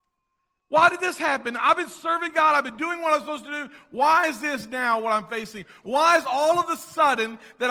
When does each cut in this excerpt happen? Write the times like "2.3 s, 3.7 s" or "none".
5.8 s